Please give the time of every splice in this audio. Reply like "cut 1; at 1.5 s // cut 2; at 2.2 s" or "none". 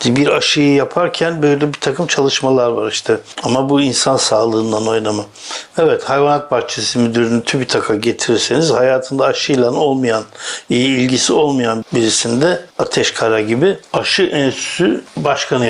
cut 1; at 3.3 s // cut 2; at 5.7 s